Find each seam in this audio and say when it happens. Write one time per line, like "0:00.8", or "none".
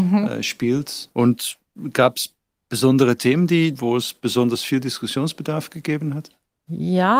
0:01.1
0:03.7